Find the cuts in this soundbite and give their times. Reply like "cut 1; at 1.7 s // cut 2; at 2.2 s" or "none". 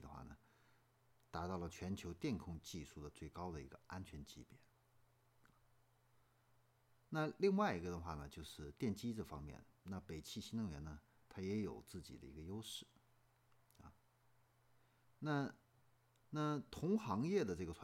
cut 1; at 16.2 s